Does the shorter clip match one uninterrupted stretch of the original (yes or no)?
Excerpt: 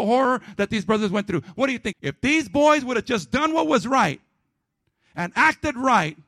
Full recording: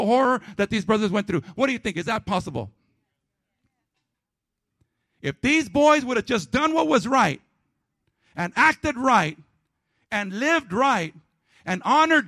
no